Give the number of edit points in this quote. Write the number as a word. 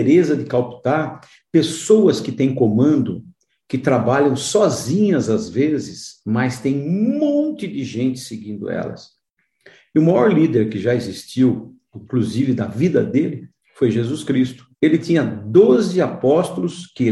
two